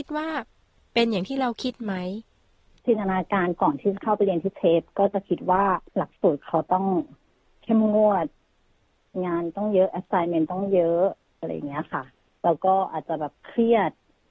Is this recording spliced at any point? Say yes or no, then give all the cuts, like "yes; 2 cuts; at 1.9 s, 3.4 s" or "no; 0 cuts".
yes; 1 cut; at 5.9 s